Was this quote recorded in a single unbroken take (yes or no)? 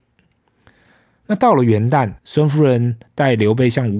no